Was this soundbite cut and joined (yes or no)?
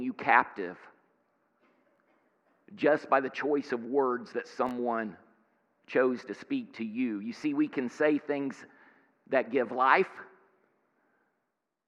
no